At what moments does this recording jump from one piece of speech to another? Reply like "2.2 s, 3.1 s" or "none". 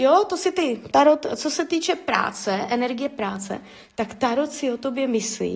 0.9 s